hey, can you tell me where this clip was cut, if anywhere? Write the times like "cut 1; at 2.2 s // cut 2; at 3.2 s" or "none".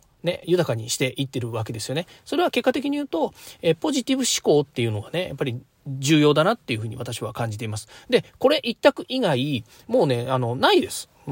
none